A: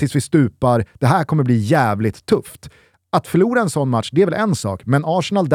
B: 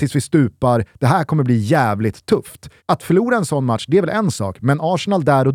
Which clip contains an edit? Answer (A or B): B